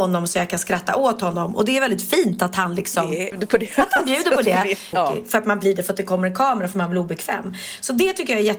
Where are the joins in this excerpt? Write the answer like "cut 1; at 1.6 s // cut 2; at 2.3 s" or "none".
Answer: cut 1; at 3.3 s // cut 2; at 4.9 s